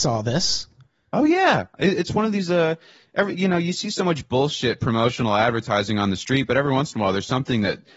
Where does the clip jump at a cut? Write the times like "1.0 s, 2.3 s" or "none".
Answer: none